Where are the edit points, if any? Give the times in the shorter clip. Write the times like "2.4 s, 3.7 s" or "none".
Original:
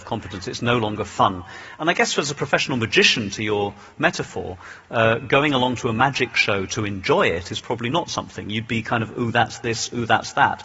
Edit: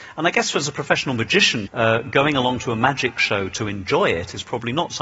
1.7 s